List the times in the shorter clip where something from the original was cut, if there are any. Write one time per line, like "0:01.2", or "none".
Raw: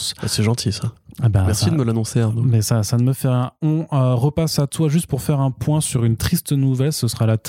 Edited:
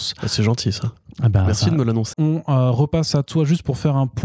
0:02.1